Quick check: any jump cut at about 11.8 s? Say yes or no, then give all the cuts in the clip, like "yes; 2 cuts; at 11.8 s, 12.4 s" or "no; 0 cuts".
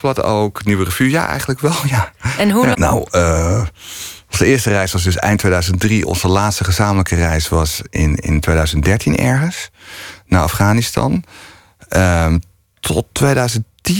no; 1 cut; at 2.7 s